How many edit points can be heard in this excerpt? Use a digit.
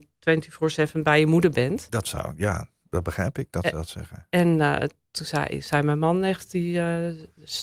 0